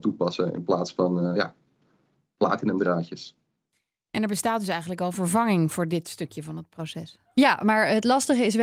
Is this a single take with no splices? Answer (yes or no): yes